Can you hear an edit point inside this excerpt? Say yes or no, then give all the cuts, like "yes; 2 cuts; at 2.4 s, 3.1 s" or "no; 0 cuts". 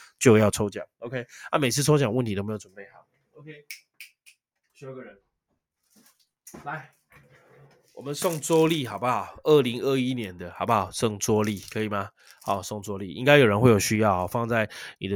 no; 0 cuts